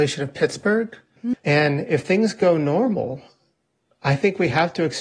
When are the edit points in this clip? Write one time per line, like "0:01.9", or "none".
0:01.3